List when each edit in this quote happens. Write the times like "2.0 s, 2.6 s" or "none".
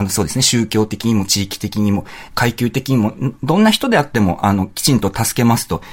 none